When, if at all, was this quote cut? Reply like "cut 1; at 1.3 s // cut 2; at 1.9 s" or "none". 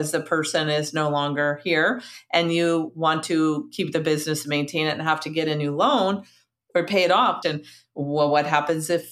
cut 1; at 7.4 s